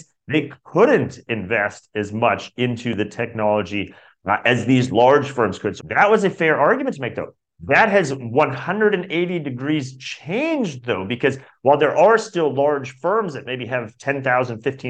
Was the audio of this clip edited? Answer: yes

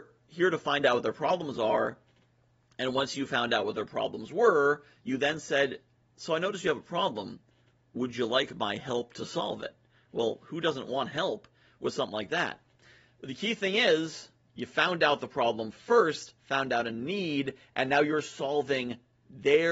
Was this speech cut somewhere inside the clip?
no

